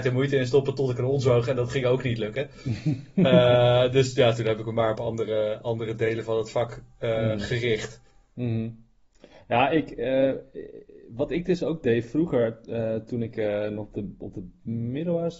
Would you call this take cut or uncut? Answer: uncut